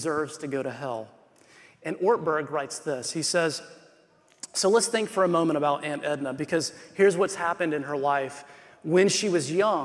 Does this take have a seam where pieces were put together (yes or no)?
no